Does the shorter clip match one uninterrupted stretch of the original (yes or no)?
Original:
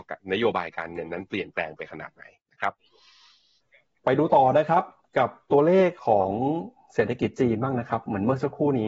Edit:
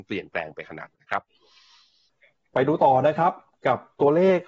no